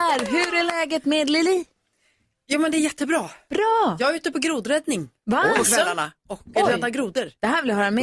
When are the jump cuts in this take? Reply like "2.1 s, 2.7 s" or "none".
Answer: none